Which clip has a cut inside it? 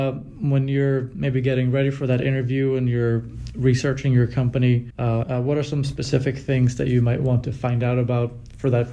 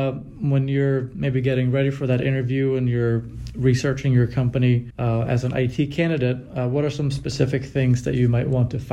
first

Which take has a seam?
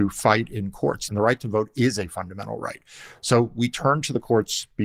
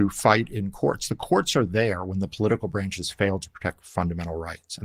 first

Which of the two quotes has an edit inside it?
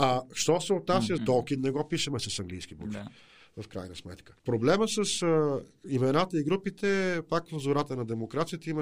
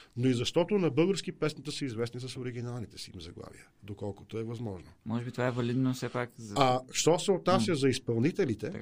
first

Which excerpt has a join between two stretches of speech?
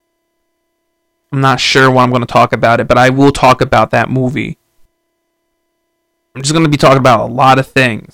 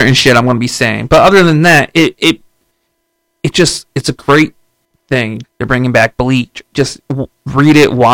second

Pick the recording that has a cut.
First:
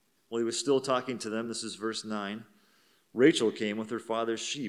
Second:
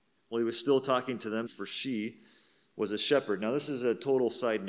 second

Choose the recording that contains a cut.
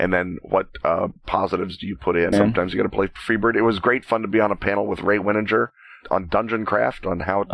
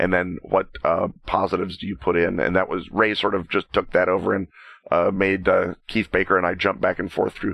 first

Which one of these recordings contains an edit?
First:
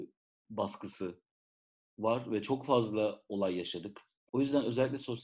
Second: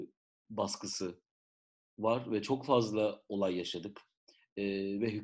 first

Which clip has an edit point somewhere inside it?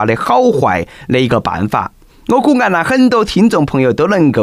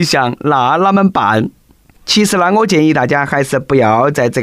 second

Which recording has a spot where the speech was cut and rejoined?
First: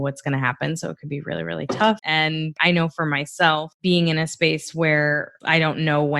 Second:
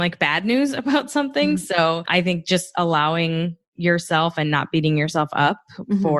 first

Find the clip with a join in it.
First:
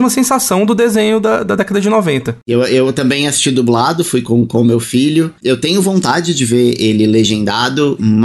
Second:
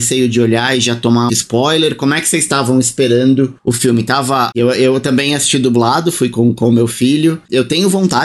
second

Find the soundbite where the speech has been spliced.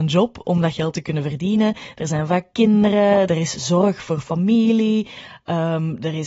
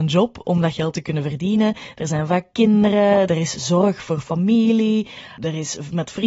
second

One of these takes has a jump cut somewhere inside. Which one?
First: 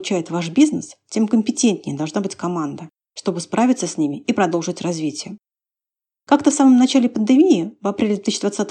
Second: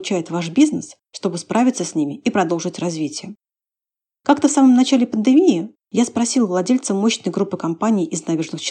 second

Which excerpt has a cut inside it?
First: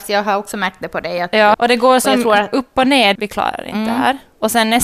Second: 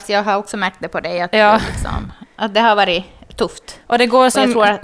first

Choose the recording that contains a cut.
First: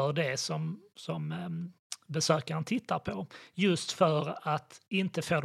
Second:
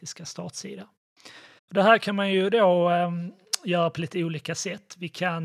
second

